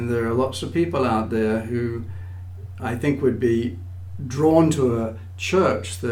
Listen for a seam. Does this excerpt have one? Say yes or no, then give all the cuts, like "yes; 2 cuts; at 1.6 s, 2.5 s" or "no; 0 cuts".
yes; 1 cut; at 2.8 s